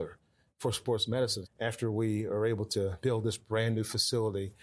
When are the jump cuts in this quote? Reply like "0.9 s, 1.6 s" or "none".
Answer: 1.4 s, 3.0 s